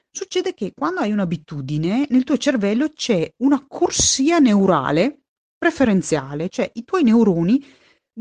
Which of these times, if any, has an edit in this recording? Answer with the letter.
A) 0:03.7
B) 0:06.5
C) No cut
C